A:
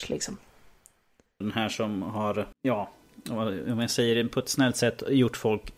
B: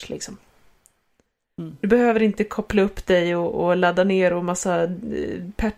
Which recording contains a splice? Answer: A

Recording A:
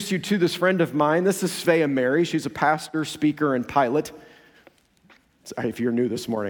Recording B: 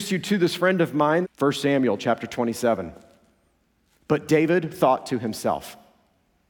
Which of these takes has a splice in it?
B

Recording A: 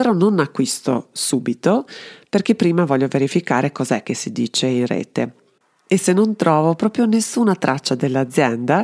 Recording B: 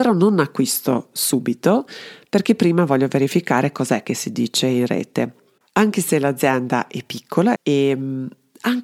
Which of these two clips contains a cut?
B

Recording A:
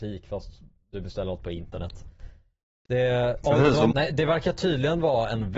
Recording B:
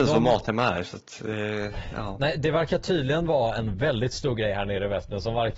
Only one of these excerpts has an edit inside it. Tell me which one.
A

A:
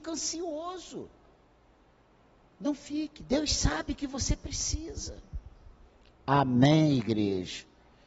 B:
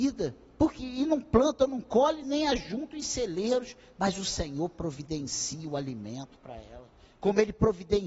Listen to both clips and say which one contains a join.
B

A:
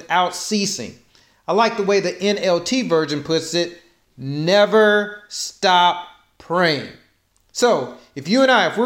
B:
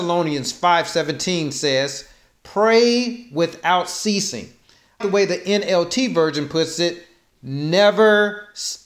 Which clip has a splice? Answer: B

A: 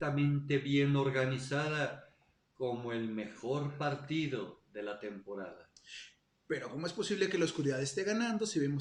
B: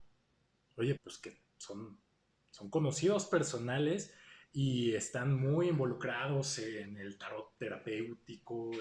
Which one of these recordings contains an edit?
B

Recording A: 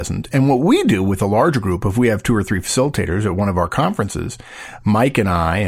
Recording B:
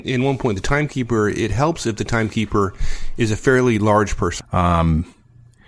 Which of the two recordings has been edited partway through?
B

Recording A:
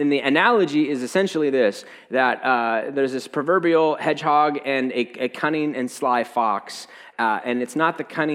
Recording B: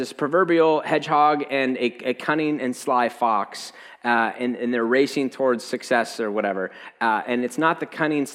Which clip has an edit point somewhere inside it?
A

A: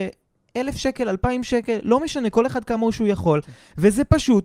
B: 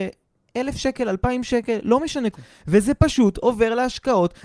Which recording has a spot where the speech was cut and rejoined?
B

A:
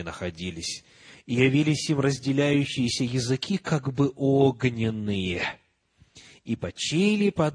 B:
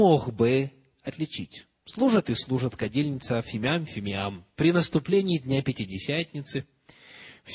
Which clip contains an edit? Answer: B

